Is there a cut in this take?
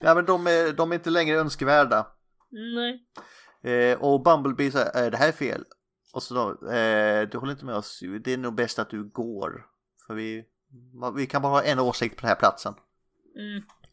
no; 0 cuts

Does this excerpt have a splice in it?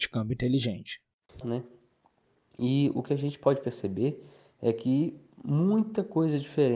yes; 1 cut; at 1.4 s

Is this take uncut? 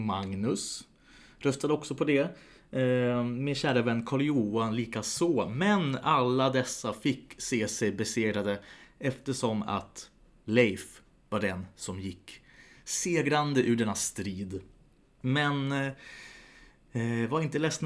yes; 0 cuts

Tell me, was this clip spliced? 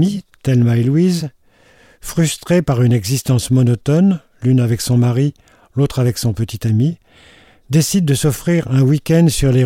no; 0 cuts

